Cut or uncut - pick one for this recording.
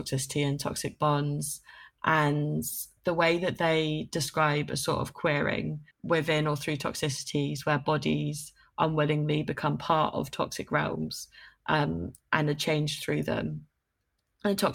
cut